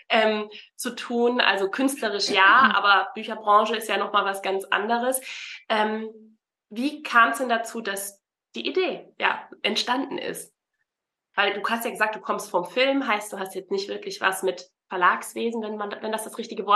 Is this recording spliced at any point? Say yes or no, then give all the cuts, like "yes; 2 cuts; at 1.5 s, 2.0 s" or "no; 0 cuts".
yes; 1 cut; at 11.3 s